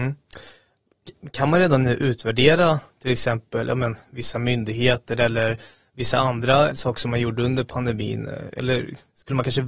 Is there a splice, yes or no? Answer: yes